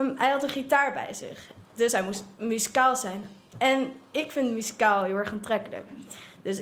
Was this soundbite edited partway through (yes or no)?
no